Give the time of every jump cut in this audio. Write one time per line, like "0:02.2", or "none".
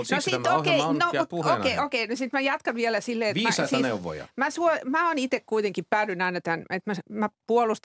none